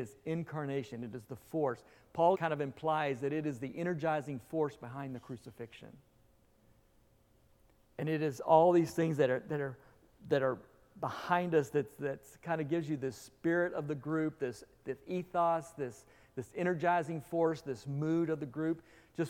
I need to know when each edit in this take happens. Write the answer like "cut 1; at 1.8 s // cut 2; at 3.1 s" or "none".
cut 1; at 2.3 s

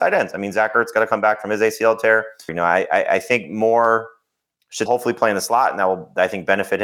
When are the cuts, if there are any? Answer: cut 1; at 2.5 s // cut 2; at 4.9 s

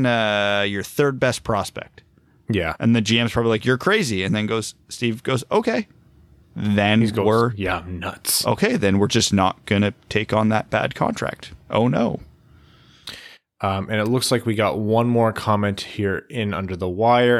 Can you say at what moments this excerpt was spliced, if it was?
none

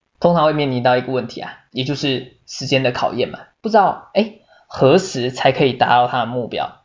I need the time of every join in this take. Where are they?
cut 1; at 3.6 s

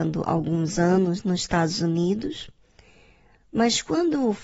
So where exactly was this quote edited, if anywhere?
none

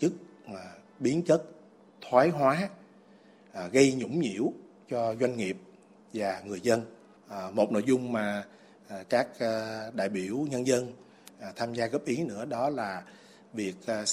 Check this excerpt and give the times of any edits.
cut 1; at 7.2 s

